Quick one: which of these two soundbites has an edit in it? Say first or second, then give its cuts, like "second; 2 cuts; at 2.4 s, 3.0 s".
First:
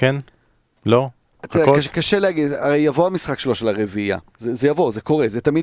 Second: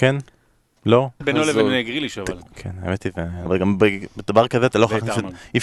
second; 3 cuts; at 1.2 s, 2.4 s, 3.5 s